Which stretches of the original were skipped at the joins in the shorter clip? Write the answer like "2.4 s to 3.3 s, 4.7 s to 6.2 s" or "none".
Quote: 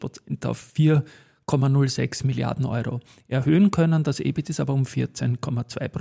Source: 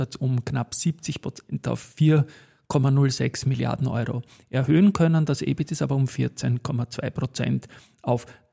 none

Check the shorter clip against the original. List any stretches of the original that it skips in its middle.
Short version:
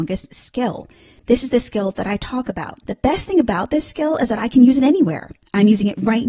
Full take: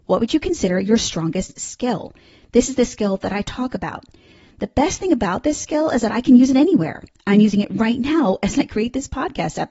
4.1 s to 4.5 s

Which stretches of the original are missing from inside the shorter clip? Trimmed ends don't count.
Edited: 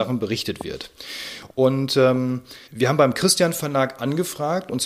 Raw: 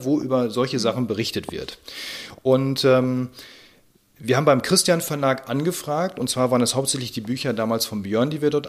3.5 s to 4.1 s

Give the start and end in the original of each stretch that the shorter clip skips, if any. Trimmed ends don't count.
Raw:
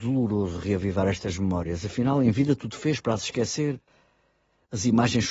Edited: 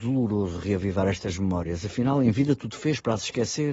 none

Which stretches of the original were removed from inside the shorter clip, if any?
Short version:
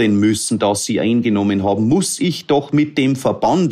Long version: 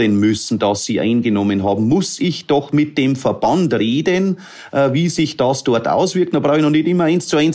none

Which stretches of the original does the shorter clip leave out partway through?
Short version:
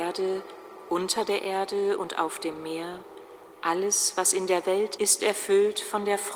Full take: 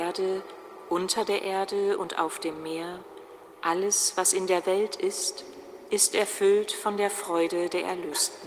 5.0 s to 5.9 s

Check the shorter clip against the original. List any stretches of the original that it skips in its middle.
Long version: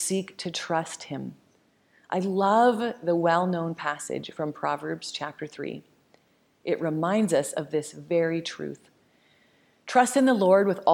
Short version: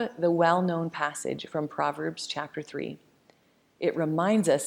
none

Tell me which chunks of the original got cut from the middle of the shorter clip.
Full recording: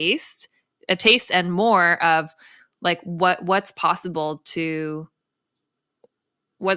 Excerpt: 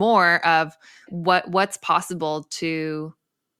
2.6 s to 3.0 s

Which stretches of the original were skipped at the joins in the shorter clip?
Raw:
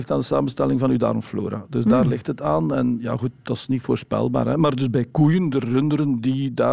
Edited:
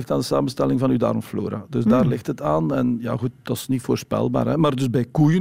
none

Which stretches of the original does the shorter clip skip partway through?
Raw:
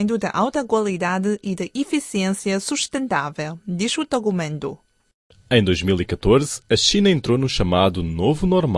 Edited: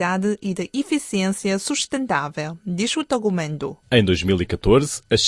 4.8 s to 5.4 s

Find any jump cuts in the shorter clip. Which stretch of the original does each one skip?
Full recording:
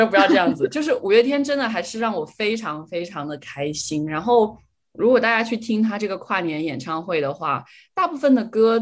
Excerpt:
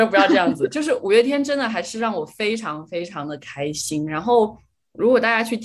none

